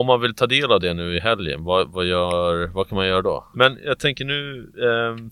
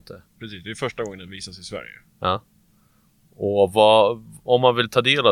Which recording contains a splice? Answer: first; 1 cut; at 3.5 s

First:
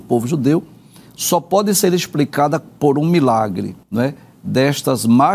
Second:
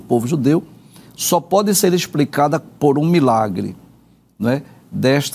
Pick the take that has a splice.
first; 1 cut; at 3.8 s

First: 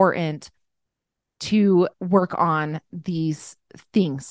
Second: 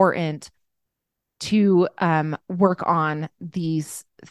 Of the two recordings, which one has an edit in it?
first; 1 cut; at 1.9 s

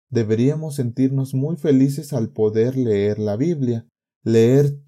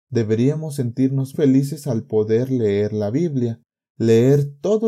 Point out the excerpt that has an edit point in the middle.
second; 1 cut; at 1.3 s

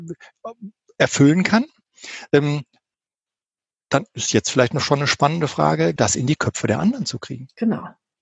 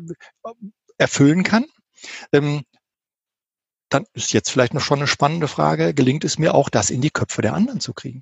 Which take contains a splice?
first; 1 cut; at 6.0 s

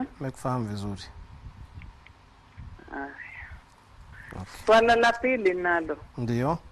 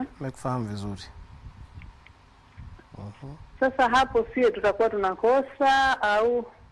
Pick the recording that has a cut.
second; 1 cut; at 2.8 s

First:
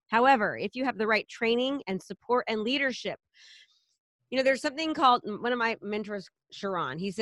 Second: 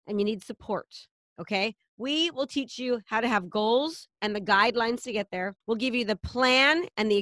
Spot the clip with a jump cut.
second; 1 cut; at 5.6 s

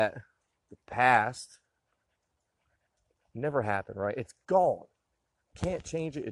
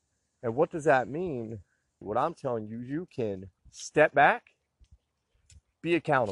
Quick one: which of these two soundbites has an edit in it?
second; 2 cuts; at 2.0 s, 3.6 s

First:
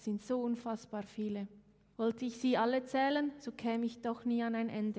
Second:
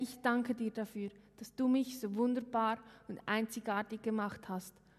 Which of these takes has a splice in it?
first; 1 cut; at 1.9 s

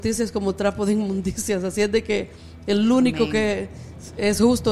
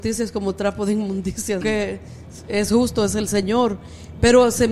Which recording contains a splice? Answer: second; 1 cut; at 1.6 s

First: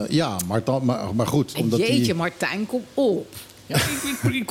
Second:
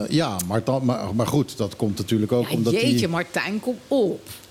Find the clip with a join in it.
first; 1 cut; at 1.5 s

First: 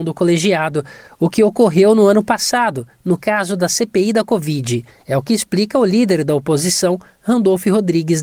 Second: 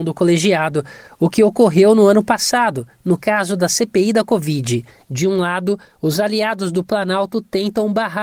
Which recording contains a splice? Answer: second; 1 cut; at 5.0 s

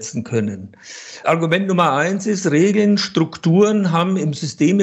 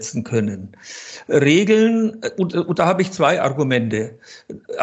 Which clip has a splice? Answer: first; 1 cut; at 1.2 s

